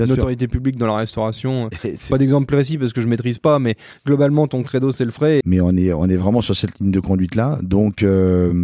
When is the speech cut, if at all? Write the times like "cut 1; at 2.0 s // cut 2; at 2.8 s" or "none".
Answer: cut 1; at 5.4 s